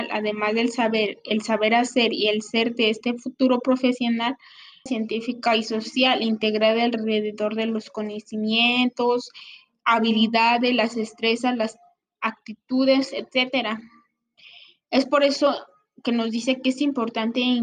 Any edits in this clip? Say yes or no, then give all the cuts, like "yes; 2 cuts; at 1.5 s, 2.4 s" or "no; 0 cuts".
yes; 1 cut; at 4.9 s